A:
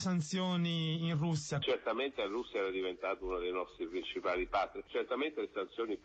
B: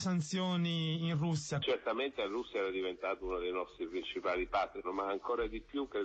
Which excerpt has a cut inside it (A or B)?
B